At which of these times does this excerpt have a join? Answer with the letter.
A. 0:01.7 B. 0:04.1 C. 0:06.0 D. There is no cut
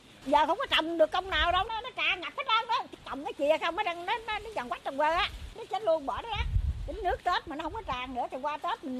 A